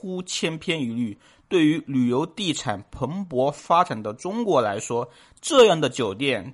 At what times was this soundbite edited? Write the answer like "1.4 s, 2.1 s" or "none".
none